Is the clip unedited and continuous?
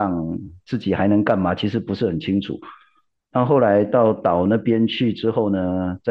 yes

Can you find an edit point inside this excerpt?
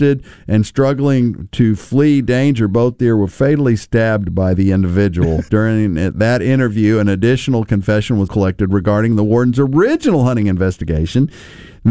yes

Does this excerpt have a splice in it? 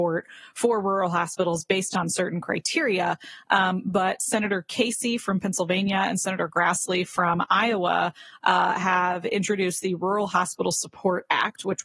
no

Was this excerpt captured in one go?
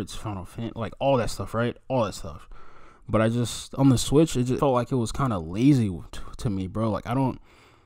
no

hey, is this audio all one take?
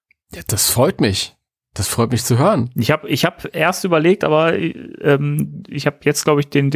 yes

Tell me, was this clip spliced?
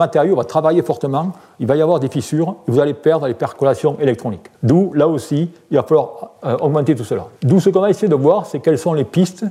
yes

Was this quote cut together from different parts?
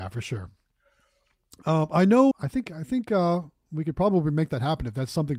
yes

